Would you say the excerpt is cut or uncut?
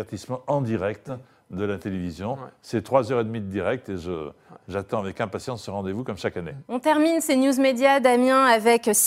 cut